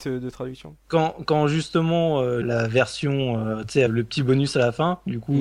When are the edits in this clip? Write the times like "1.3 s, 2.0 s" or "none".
2.4 s, 3.9 s